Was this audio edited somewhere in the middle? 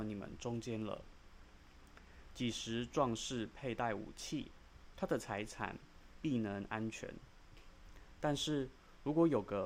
yes; 1 cut; at 4.9 s

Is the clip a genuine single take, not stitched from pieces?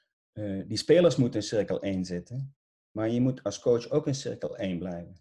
yes; 0 cuts

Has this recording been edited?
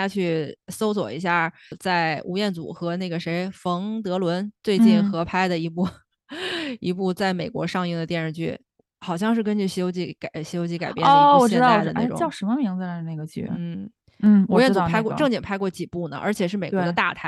no; 0 cuts

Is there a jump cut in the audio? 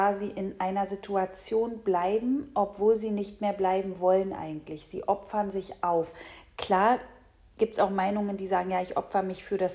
no; 0 cuts

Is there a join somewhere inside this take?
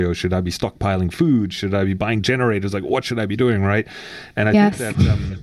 no; 0 cuts

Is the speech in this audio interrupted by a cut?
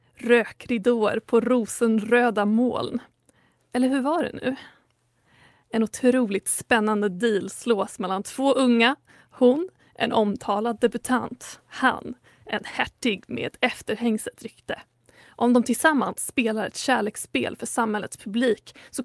no; 0 cuts

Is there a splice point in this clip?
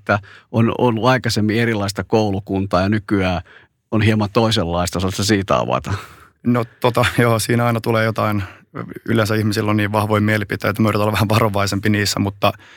no; 0 cuts

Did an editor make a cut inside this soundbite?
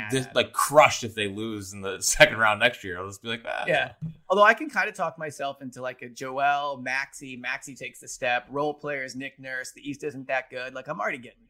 no; 0 cuts

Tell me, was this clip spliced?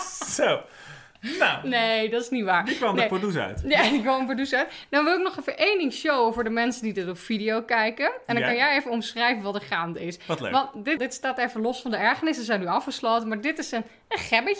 yes; 1 cut; at 11.0 s

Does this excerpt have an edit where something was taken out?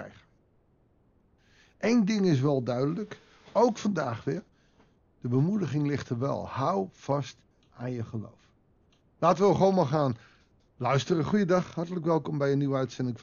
no; 0 cuts

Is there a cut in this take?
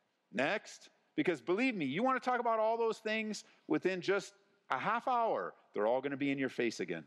yes; 1 cut; at 1.1 s

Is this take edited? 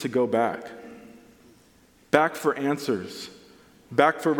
no; 0 cuts

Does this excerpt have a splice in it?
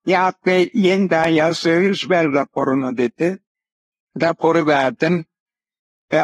no; 0 cuts

